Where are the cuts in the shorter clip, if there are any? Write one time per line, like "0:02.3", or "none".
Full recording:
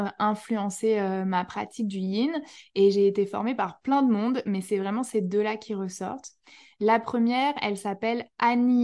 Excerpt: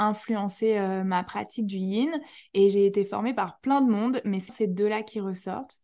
0:04.5